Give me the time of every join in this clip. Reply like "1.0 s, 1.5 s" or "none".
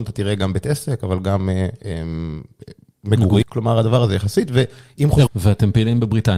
3.4 s, 5.3 s